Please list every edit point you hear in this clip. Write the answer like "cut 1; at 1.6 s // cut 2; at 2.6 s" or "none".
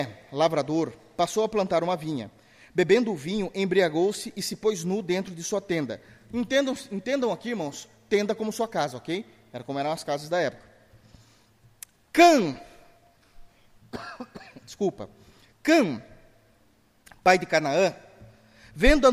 none